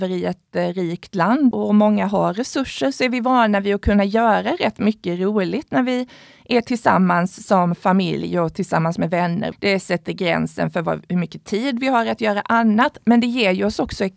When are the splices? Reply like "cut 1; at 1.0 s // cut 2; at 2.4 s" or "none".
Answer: cut 1; at 1.5 s // cut 2; at 9.5 s